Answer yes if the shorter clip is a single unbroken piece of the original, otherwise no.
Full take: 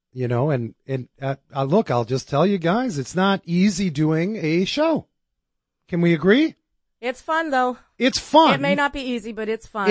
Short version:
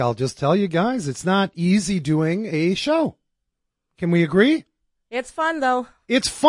yes